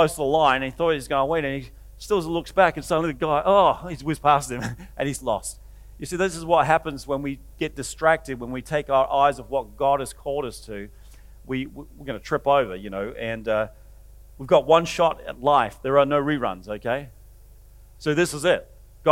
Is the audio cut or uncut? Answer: uncut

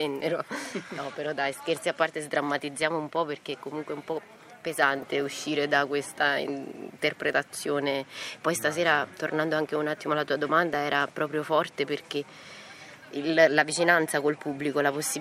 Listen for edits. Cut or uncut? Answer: uncut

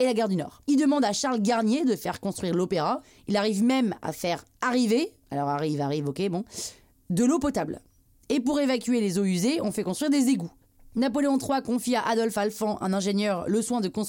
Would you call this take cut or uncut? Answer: uncut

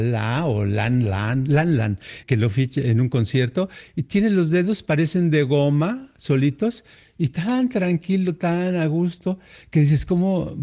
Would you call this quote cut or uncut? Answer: cut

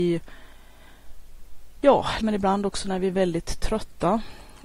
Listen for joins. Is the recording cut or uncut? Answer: cut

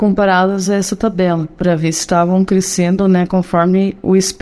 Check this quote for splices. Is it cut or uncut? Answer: uncut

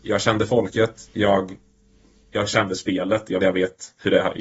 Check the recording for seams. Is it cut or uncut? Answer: cut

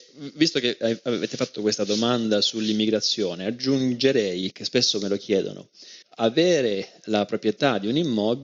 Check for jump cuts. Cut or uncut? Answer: cut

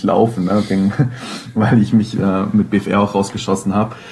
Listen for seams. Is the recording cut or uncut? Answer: uncut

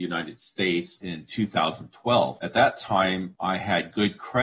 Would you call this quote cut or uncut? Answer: uncut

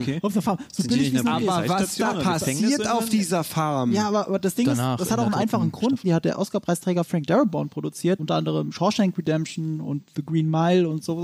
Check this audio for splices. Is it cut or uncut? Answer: cut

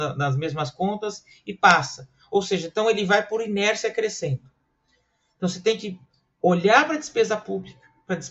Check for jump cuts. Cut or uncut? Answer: uncut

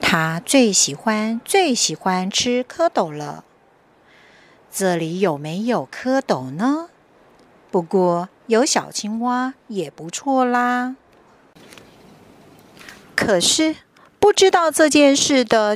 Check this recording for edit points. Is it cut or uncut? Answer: uncut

